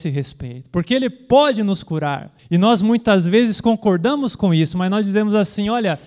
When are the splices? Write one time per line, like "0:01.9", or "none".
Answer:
none